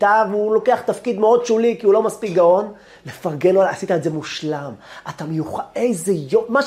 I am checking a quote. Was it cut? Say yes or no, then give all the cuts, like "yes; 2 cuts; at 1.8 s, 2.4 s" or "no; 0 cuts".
no; 0 cuts